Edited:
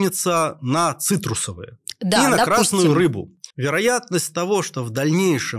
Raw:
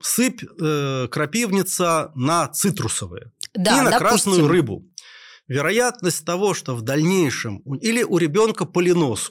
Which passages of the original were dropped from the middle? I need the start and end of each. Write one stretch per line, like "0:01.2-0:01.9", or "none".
0:05.0-0:05.4